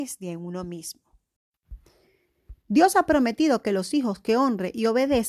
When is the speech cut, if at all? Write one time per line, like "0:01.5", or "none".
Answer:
0:02.6